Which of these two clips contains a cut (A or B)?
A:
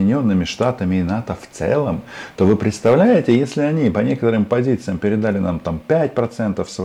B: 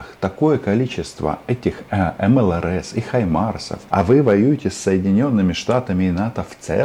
B